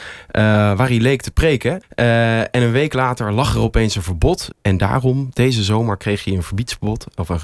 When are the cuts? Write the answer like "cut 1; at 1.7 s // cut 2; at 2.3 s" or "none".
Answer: cut 1; at 1.8 s // cut 2; at 4.5 s